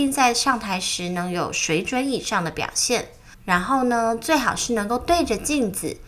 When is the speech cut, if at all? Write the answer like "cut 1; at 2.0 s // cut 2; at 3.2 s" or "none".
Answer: cut 1; at 3.3 s